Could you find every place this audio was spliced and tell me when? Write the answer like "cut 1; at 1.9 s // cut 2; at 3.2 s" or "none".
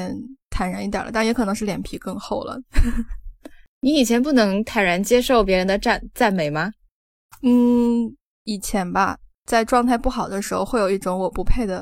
none